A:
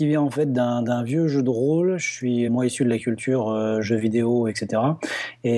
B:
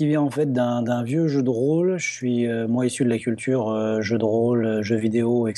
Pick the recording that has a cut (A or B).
A